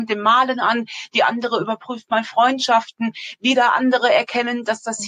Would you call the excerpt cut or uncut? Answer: uncut